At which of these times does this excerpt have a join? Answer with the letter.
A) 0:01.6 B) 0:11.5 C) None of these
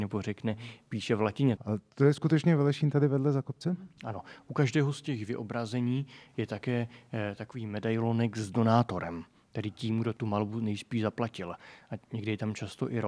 A